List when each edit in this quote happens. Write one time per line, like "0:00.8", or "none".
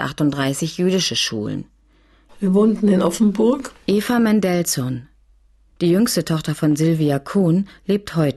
0:02.3